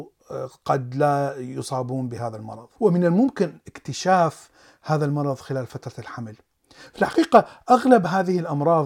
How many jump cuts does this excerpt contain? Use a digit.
1